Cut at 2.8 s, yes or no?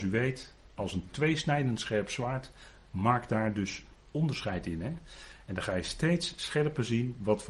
no